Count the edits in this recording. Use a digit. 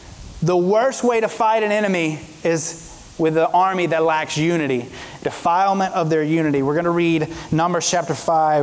1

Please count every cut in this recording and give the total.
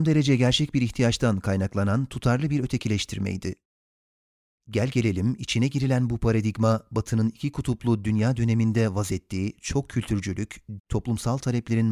1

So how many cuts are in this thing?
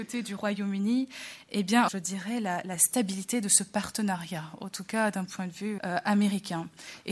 2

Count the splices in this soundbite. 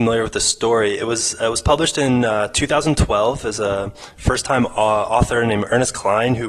0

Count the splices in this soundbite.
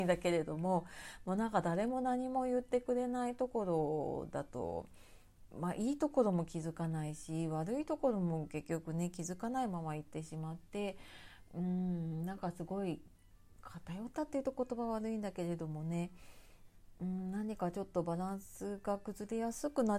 0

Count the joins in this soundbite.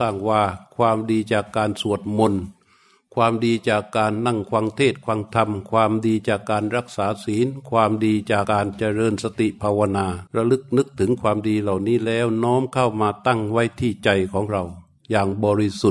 2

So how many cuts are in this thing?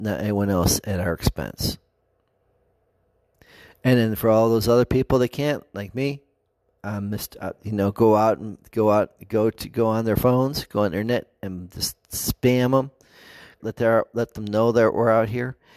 1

